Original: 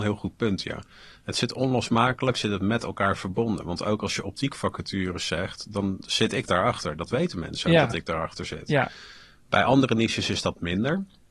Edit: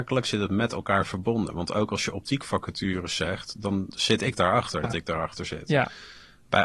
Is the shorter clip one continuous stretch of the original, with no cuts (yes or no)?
no